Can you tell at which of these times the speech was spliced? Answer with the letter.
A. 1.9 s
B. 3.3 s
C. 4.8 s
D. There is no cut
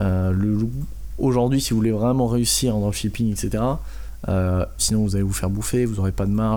C